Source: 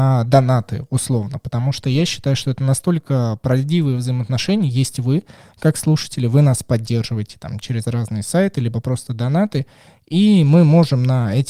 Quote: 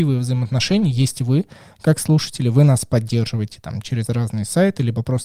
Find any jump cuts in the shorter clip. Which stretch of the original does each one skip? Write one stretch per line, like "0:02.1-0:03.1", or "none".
none